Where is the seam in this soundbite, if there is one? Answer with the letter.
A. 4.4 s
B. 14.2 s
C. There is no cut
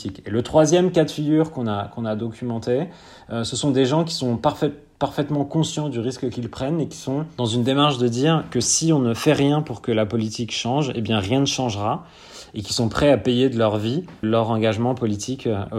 B